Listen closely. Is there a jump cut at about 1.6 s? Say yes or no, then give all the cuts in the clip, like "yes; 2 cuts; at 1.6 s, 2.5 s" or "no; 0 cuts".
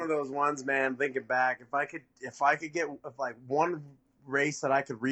no; 0 cuts